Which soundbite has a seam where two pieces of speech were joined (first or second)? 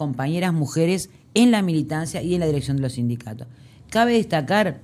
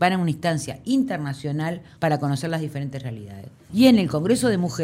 second